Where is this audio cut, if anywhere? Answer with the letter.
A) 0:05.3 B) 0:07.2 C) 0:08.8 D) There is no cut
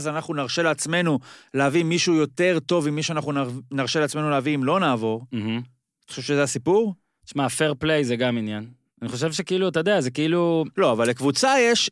D